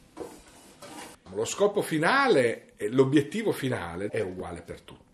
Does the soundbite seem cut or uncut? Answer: cut